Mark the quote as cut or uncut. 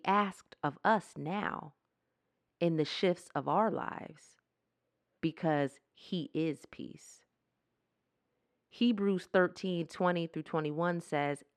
cut